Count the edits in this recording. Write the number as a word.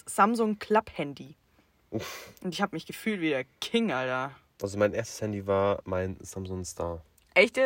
zero